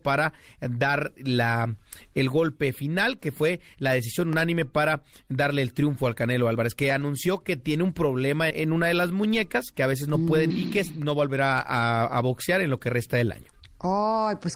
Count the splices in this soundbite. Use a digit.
2